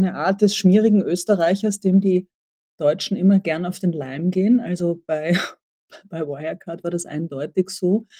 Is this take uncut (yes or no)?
yes